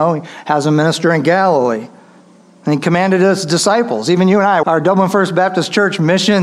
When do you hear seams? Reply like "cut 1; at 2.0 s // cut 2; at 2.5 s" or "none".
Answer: cut 1; at 4.6 s

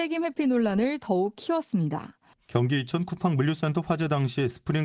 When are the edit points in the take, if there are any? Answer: cut 1; at 2.3 s

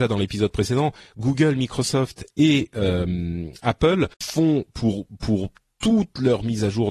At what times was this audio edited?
cut 1; at 4.1 s

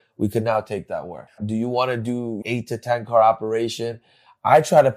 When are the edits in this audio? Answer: cut 1; at 1.4 s // cut 2; at 2.4 s

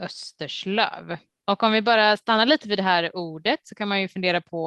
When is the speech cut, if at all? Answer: cut 1; at 1.3 s

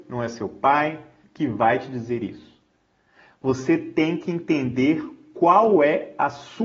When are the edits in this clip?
cut 1; at 1.2 s

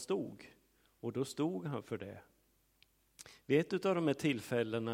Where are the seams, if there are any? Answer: none

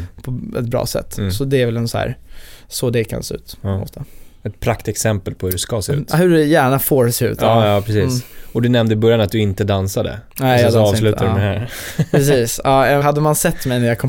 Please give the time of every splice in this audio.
cut 1; at 13.0 s

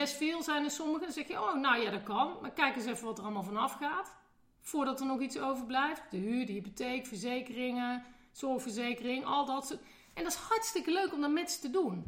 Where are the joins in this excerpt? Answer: none

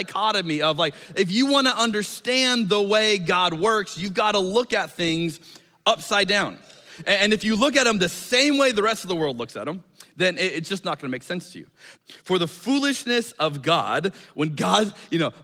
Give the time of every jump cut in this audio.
cut 1; at 12.0 s

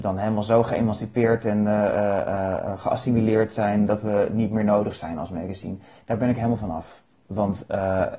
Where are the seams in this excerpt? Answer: cut 1; at 7.1 s

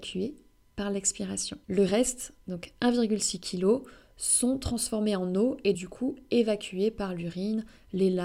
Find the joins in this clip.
cut 1; at 1.6 s // cut 2; at 5.7 s

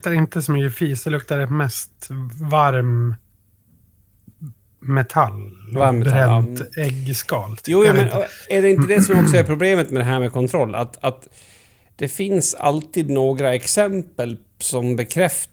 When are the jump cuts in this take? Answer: none

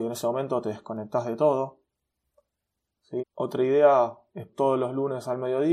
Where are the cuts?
cut 1; at 3.2 s // cut 2; at 4.5 s

